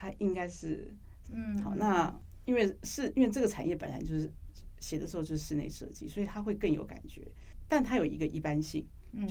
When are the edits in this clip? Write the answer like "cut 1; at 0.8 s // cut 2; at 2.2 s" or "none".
cut 1; at 1.2 s